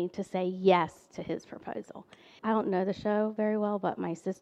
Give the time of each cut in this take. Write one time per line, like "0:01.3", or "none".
0:02.4